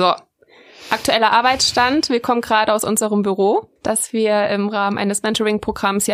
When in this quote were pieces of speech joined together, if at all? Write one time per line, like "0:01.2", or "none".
0:03.8